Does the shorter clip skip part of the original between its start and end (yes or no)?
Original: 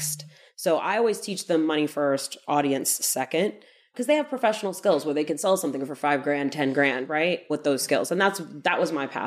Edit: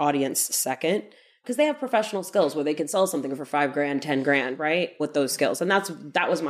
no